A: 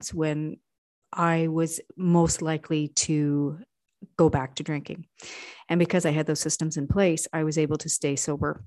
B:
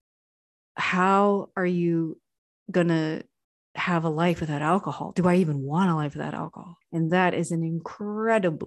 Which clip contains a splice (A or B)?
B